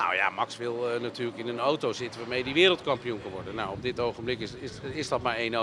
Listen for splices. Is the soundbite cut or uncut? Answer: uncut